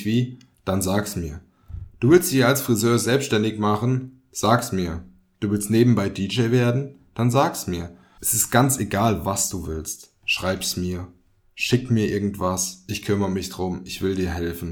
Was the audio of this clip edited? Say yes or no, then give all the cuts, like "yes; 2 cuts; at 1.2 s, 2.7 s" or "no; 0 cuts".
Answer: yes; 1 cut; at 8.2 s